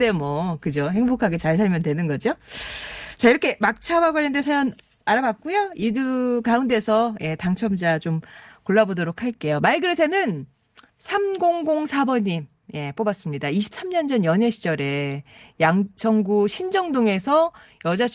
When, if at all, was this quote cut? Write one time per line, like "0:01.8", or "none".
0:10.9